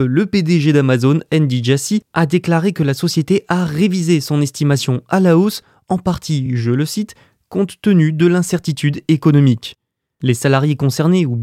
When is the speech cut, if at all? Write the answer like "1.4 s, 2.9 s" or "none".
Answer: none

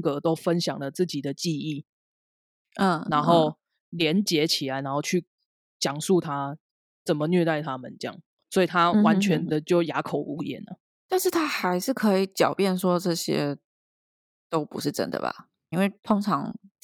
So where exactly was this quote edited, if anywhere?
15.7 s

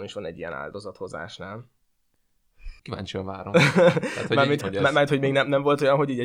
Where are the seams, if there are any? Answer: 2.8 s, 4.6 s

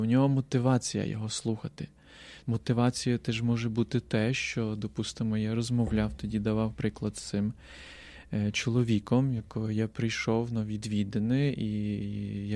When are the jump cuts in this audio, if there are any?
2.4 s

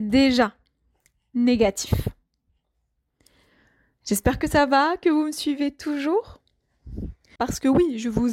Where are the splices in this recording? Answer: 7.4 s

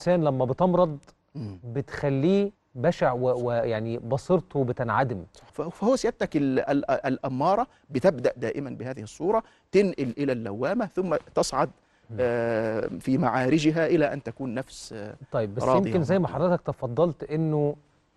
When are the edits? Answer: 2.5 s, 5.5 s, 13.0 s

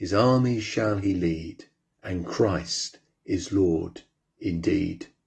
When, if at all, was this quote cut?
1.9 s

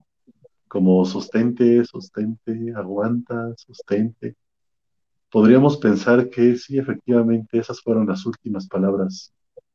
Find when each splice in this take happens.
1.8 s

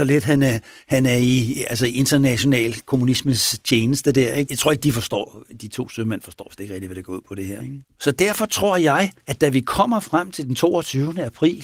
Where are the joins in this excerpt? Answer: 4.5 s, 7.6 s, 9.2 s

